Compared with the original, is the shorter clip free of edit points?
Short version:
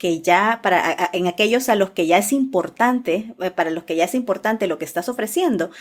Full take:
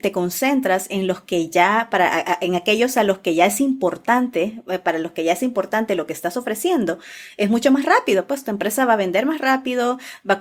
yes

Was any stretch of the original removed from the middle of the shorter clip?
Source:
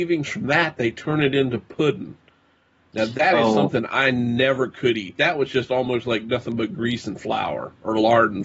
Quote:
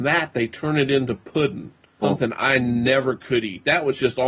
yes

